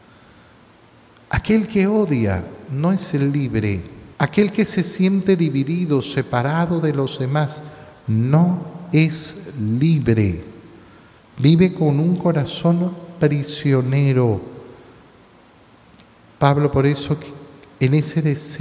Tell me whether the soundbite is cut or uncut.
cut